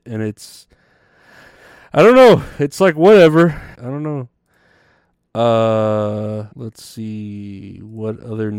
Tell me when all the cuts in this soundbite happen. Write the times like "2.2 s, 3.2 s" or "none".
3.7 s, 6.5 s